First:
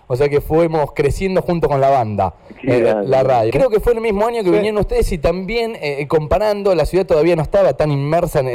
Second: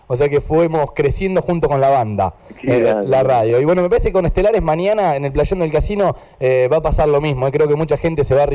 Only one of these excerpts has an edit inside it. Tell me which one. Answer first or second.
first